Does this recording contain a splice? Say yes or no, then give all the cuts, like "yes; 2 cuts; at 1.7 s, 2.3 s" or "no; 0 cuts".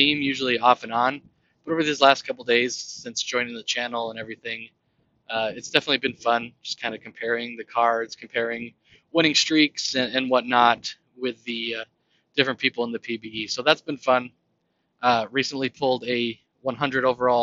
no; 0 cuts